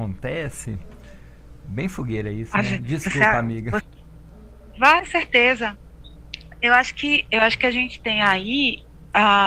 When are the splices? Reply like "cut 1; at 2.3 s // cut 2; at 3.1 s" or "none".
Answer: cut 1; at 3.8 s